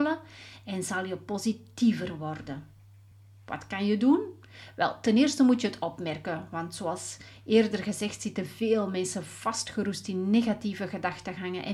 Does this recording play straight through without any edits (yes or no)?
yes